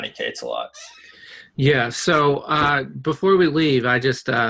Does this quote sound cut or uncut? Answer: uncut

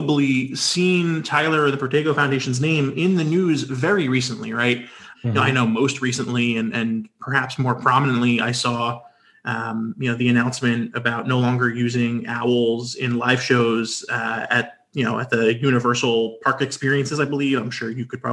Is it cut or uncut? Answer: cut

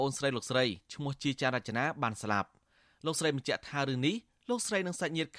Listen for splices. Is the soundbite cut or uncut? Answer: uncut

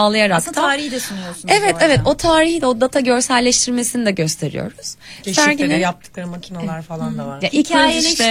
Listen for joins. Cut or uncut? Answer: cut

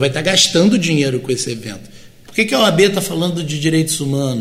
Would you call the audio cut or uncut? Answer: cut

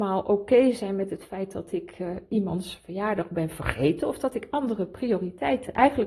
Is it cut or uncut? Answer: uncut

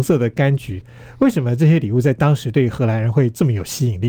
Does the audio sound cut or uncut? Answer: uncut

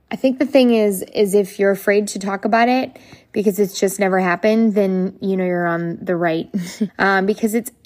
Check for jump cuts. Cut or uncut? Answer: cut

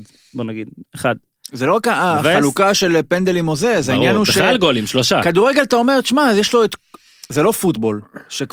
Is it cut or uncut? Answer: uncut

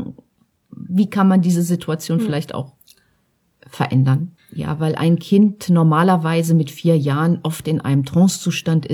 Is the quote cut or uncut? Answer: cut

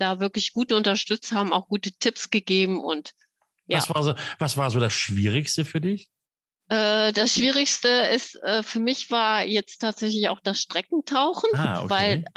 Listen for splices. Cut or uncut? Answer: uncut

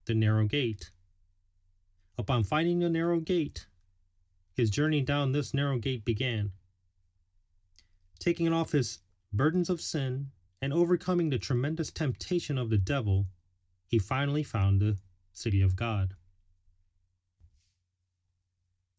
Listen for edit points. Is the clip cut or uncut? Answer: uncut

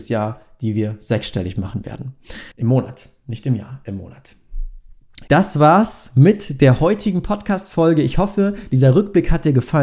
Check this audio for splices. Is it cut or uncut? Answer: cut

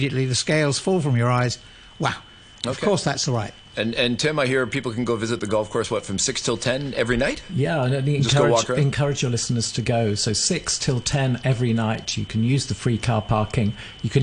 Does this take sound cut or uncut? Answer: uncut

